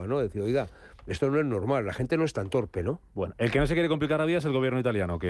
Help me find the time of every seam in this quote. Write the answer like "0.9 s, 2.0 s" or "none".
1.0 s